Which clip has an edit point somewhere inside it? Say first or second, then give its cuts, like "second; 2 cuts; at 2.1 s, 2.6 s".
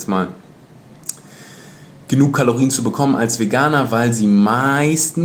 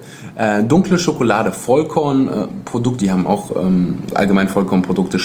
second; 2 cuts; at 3.0 s, 4.1 s